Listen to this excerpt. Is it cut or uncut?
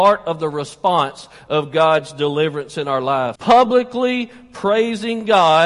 cut